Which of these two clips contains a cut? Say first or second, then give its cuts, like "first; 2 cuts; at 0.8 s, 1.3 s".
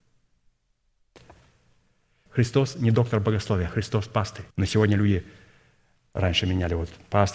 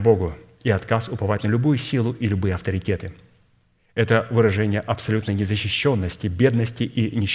first; 2 cuts; at 2.3 s, 4.5 s